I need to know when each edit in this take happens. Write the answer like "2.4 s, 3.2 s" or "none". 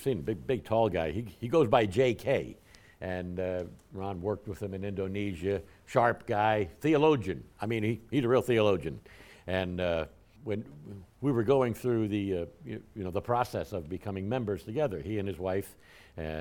2.8 s, 10.4 s